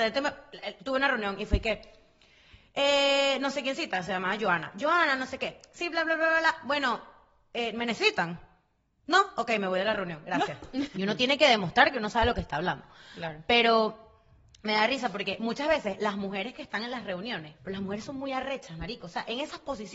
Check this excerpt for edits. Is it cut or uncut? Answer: cut